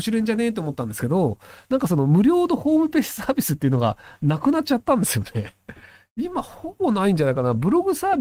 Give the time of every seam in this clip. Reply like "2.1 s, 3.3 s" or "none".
none

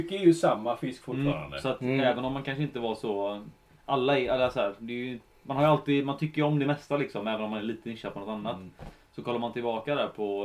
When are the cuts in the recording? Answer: none

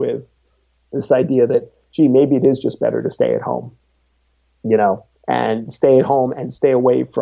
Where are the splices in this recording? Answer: 5.1 s

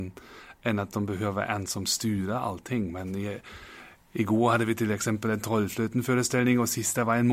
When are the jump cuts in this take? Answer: none

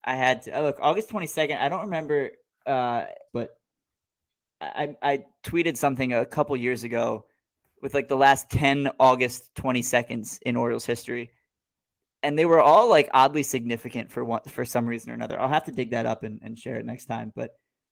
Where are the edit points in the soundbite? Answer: 3.3 s

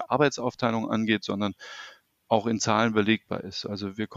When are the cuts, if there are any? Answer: none

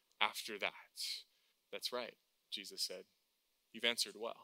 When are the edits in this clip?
1.5 s

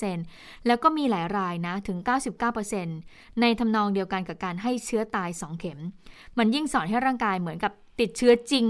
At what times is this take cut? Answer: none

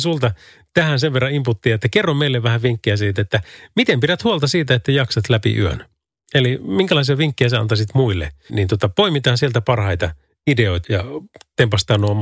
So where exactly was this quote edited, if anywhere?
8.5 s, 10.8 s

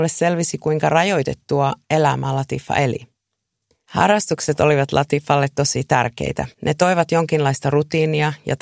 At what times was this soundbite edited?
3.7 s, 6.5 s

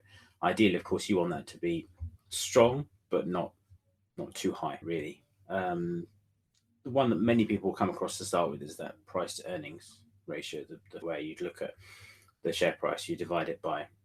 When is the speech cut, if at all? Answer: 4.8 s, 11.0 s

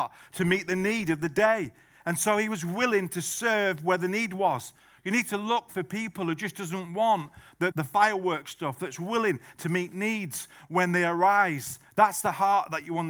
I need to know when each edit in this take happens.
7.7 s

